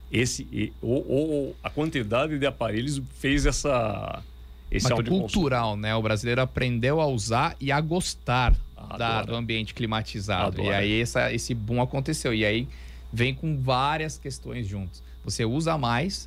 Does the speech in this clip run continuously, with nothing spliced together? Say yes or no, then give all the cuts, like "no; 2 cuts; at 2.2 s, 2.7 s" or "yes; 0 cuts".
no; 1 cut; at 5.0 s